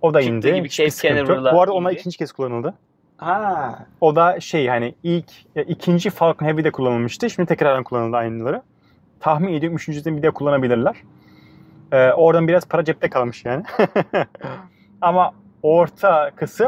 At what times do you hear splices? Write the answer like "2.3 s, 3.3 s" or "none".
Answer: none